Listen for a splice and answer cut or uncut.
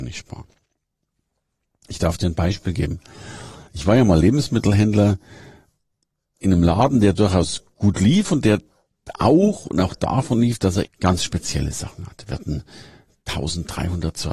cut